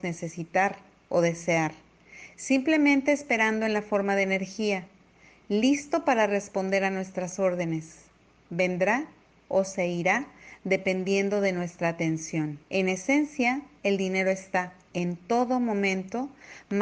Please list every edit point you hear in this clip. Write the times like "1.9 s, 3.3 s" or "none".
12.6 s